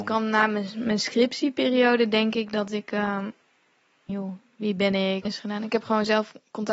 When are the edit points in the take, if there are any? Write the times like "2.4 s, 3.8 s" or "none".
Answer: 4.1 s, 5.3 s